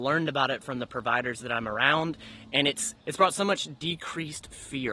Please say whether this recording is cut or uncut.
cut